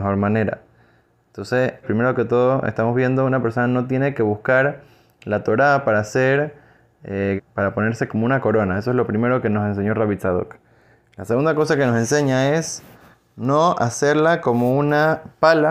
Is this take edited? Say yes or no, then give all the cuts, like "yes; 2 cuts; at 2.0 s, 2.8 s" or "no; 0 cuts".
yes; 2 cuts; at 1.8 s, 7.4 s